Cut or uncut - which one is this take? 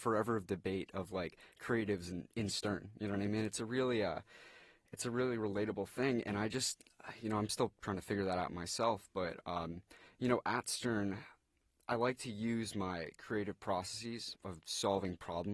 uncut